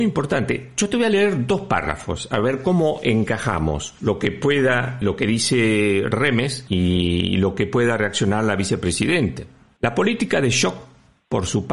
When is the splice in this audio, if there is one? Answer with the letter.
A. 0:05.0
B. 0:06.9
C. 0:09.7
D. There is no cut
A